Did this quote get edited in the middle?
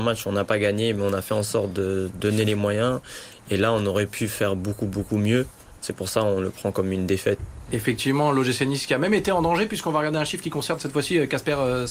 yes; 2 cuts; at 5.8 s, 7.4 s

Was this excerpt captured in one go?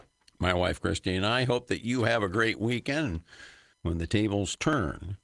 no; 1 cut; at 3.7 s

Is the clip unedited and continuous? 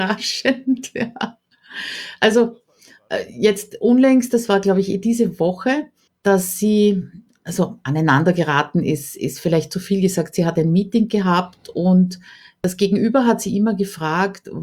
no; 1 cut; at 6.1 s

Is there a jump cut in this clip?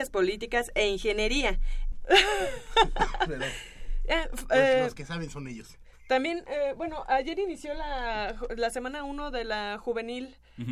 yes; 1 cut; at 1.9 s

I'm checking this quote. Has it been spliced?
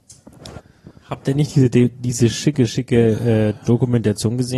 no; 0 cuts

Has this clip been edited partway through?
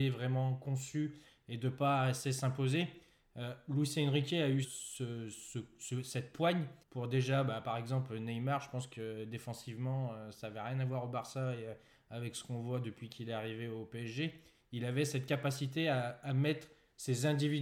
yes; 2 cuts; at 4.6 s, 6.8 s

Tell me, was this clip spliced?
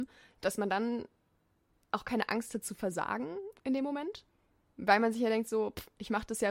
no; 0 cuts

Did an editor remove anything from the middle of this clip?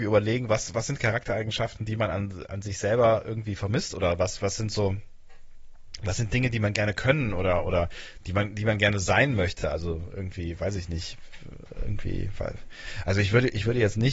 no; 0 cuts

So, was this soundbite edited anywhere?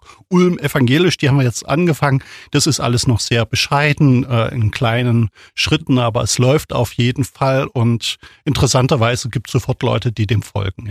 no; 0 cuts

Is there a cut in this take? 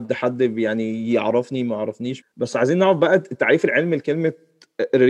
yes; 1 cut; at 2.2 s

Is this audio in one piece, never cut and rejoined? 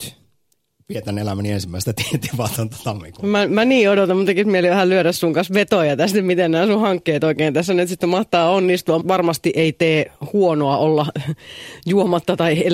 no; 1 cut; at 9.0 s

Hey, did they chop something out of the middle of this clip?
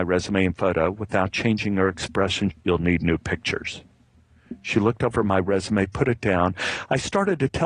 yes; 1 cut; at 2.5 s

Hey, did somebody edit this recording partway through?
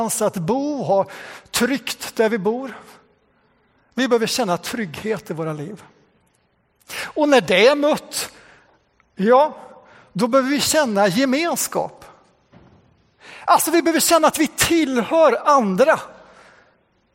no; 0 cuts

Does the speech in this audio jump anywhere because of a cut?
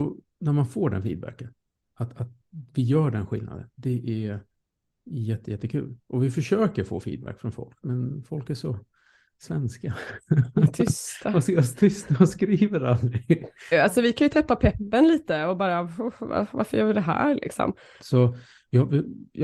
yes; 2 cuts; at 13.7 s, 18.0 s

